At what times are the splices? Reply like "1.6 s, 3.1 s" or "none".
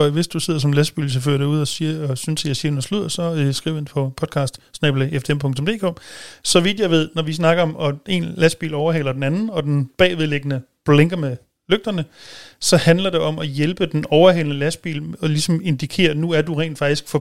none